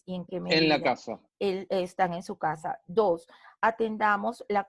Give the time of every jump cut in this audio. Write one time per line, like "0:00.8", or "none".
0:01.3